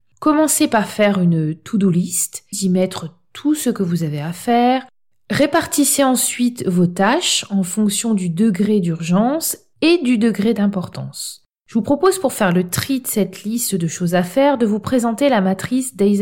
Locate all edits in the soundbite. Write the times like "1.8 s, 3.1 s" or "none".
2.5 s